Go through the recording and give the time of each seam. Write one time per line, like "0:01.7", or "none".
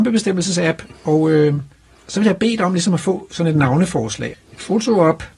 0:04.3